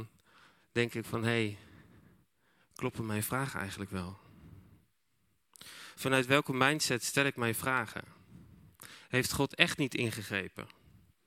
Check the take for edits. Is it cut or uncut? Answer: uncut